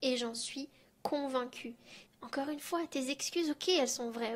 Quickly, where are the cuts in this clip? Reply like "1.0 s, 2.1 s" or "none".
2.1 s